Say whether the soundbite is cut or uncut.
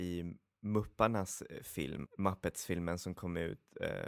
cut